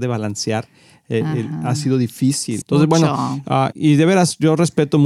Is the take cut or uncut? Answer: cut